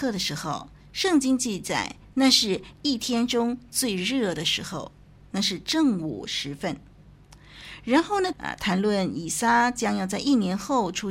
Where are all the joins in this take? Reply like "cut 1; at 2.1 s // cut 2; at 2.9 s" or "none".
cut 1; at 8.3 s